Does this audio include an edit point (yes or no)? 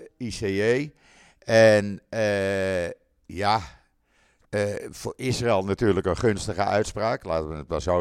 no